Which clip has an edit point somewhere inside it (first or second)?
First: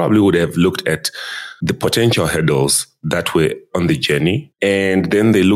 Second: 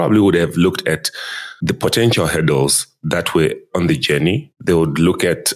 first